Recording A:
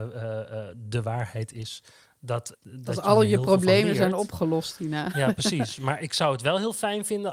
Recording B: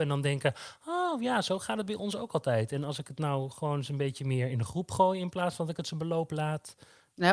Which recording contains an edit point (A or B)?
A